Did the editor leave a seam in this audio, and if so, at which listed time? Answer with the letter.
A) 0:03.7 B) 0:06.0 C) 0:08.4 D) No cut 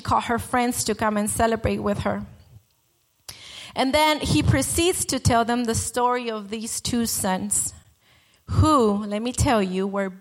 D